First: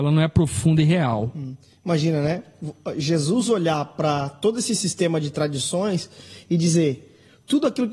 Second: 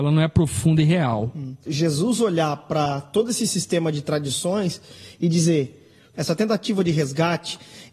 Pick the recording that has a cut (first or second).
second